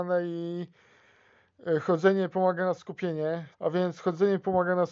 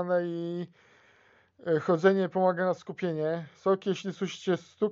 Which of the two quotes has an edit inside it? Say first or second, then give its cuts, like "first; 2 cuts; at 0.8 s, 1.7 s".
first; 1 cut; at 3.5 s